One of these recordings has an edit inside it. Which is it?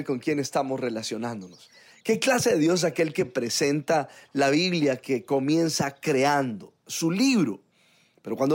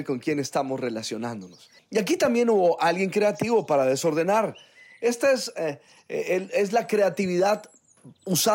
second; 1 cut; at 1.8 s

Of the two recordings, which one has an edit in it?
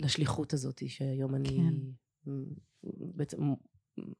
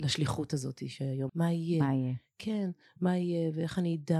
second; 1 cut; at 1.3 s

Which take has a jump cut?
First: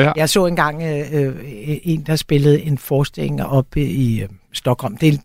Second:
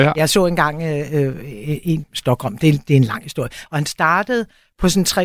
second; 2 cuts; at 2.0 s, 3.7 s

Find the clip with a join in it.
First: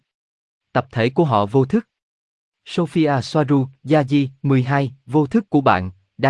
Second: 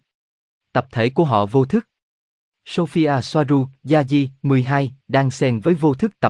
second; 1 cut; at 5.0 s

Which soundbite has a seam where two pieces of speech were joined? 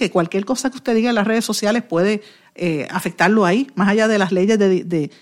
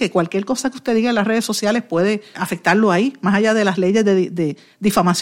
second; 1 cut; at 2.3 s

